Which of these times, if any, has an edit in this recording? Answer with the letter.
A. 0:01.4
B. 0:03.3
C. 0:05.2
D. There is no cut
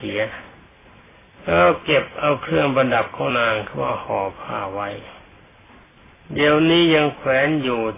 B